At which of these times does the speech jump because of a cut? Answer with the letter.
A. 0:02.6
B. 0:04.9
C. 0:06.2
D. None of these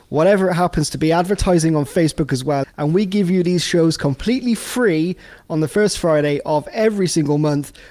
A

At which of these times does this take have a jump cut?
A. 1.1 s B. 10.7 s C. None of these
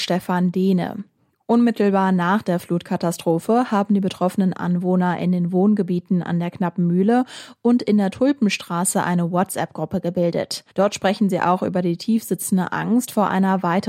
B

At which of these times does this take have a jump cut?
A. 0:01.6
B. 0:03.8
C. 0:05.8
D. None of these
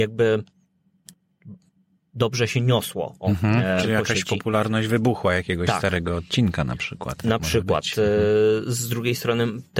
B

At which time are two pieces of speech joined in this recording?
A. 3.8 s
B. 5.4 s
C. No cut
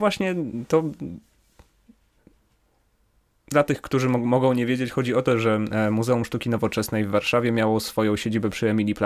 C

